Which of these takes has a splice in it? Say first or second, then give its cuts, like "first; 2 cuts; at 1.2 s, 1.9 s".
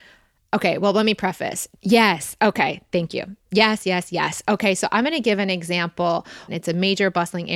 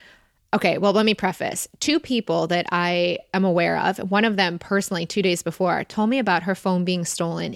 first; 2 cuts; at 1.7 s, 6.5 s